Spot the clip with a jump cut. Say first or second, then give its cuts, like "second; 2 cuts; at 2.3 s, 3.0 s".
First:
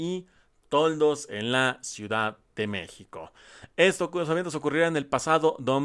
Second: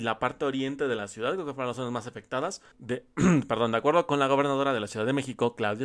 second; 1 cut; at 2.7 s